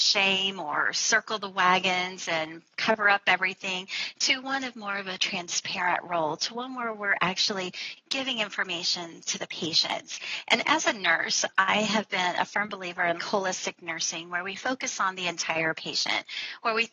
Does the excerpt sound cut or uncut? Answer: cut